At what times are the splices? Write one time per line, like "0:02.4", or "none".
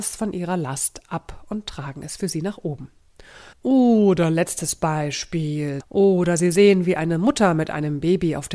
0:03.5
0:05.8